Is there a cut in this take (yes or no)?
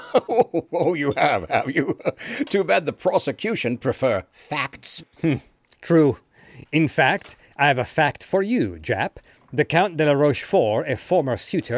no